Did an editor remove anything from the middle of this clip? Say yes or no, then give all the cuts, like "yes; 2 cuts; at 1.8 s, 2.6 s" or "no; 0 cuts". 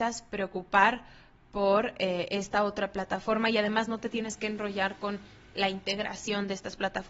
no; 0 cuts